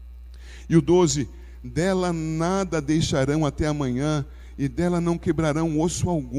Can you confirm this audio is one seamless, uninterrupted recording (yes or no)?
yes